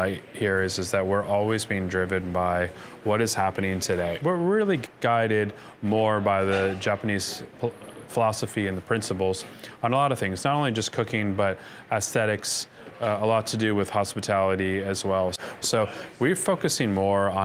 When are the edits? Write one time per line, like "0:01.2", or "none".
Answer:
0:04.2
0:15.6

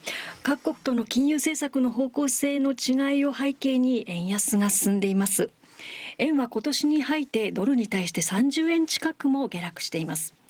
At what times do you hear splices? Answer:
0:07.3

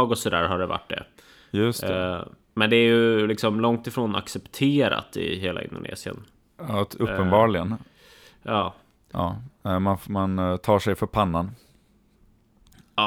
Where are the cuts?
0:09.1

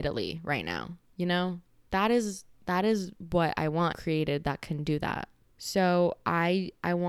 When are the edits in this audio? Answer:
0:03.9
0:05.4

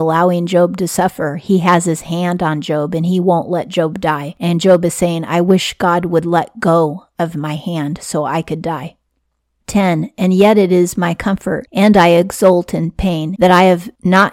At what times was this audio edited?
0:13.3

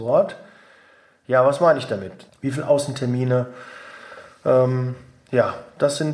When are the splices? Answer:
0:02.3

